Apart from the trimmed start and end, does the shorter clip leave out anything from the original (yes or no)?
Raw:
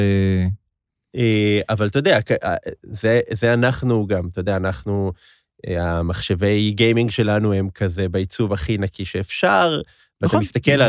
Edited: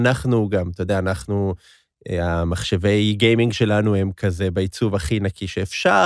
no